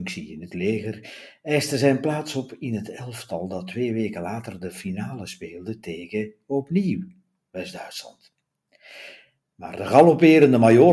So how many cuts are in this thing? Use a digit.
1